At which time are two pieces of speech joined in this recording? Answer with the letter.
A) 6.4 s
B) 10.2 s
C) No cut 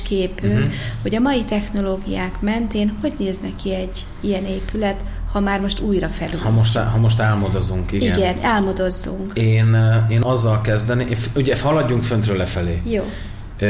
B